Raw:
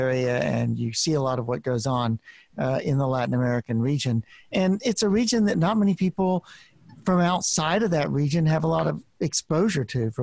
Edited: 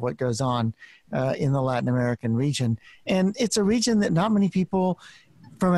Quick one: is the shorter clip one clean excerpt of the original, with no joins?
yes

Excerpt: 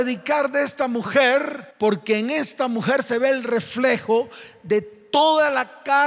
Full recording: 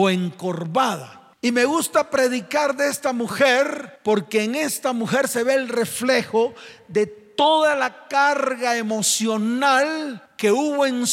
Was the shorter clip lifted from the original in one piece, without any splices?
yes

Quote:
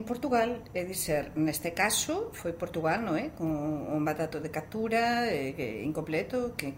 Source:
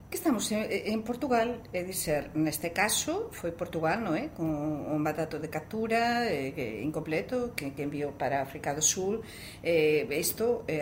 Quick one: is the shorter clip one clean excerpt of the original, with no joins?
yes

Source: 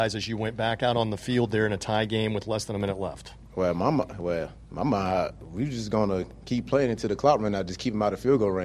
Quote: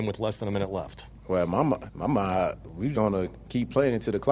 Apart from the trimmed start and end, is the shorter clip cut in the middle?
yes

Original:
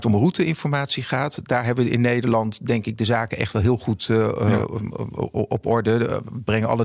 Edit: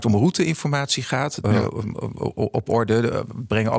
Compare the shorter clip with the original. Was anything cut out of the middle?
yes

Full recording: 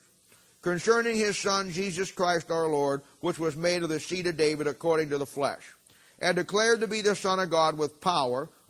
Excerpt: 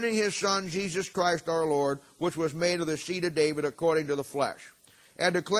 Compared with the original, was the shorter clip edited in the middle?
no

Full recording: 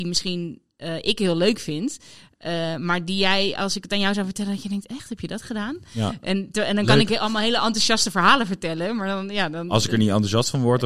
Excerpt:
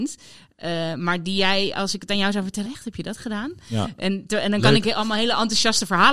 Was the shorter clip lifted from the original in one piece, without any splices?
no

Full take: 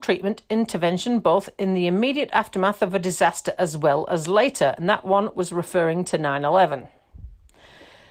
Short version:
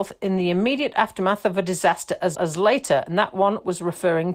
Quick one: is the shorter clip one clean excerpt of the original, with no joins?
no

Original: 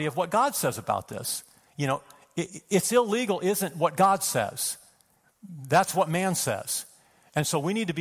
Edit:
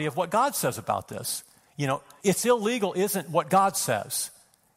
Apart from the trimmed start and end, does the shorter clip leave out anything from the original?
yes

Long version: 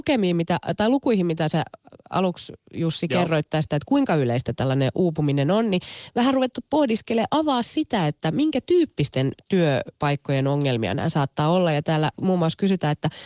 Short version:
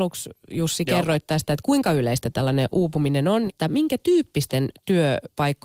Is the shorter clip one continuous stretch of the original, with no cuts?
no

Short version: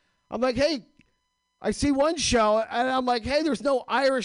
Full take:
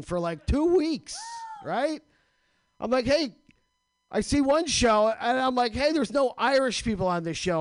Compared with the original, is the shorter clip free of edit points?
yes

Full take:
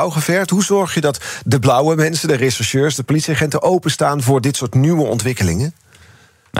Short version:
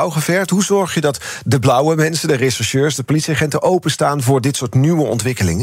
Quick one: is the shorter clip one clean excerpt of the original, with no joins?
yes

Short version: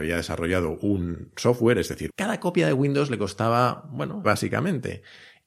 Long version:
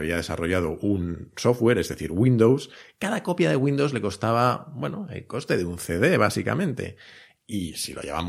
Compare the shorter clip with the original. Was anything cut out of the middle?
yes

